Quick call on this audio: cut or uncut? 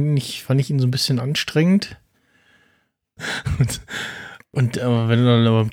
cut